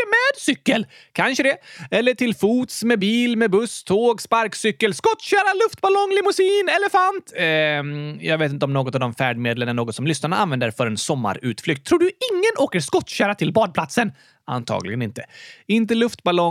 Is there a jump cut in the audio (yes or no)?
no